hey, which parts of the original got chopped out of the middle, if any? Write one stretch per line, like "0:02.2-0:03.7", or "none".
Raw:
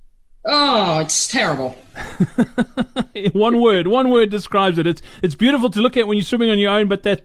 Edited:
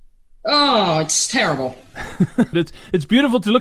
0:02.5-0:04.8